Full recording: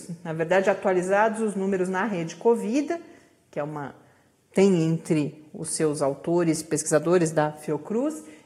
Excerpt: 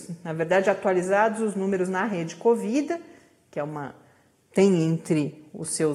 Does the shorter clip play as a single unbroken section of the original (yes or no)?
yes